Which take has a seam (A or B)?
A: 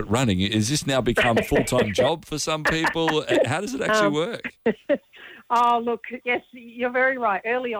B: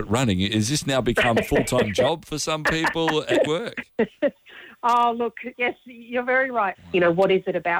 B